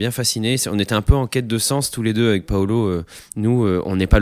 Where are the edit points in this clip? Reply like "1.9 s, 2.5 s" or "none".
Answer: none

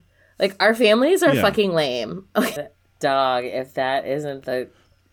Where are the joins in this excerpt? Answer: 2.6 s

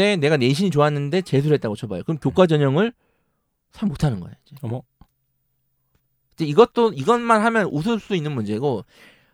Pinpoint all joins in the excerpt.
none

